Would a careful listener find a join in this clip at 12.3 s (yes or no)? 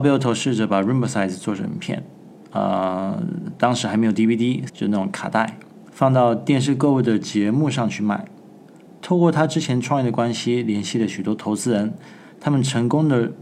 no